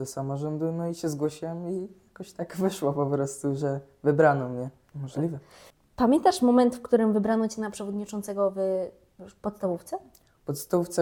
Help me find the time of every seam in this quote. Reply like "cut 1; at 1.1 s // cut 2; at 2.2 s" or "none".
cut 1; at 4.9 s